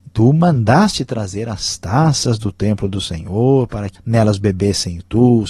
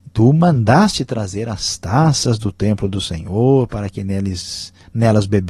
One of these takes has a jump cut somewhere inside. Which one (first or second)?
first